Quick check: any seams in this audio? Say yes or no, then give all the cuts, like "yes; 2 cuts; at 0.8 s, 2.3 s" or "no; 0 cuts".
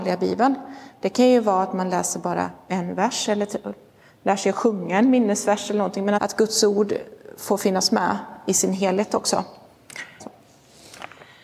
yes; 2 cuts; at 6.2 s, 10.2 s